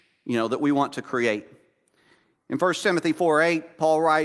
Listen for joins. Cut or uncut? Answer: uncut